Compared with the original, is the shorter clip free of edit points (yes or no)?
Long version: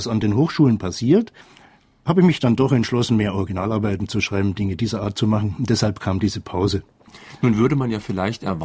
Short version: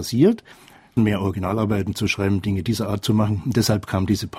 no